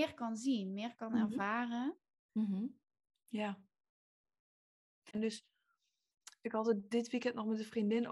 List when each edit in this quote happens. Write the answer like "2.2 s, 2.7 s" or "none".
5.1 s